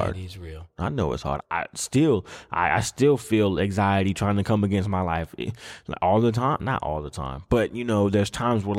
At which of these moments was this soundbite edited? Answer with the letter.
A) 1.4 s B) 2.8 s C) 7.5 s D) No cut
A